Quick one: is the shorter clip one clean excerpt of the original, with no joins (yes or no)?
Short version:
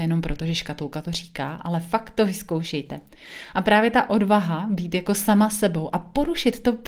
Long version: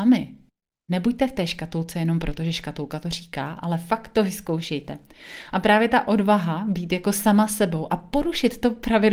yes